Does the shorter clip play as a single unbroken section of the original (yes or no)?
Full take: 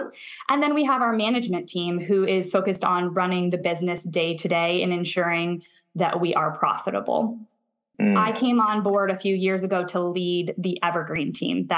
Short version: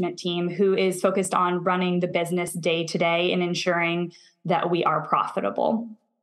yes